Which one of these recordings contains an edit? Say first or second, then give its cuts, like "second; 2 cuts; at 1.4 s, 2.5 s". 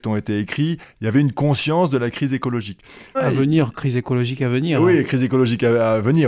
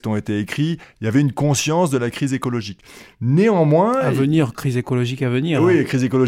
first; 1 cut; at 3.1 s